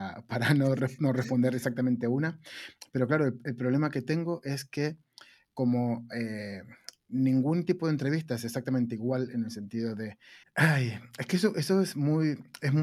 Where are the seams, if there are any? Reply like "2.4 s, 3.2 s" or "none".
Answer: 10.4 s